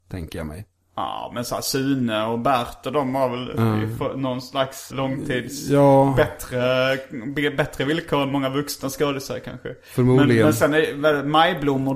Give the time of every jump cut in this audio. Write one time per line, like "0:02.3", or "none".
0:04.9